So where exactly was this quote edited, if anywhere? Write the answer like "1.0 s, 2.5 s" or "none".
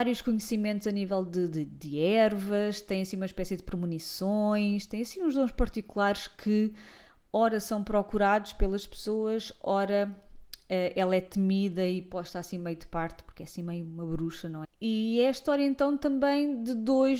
14.6 s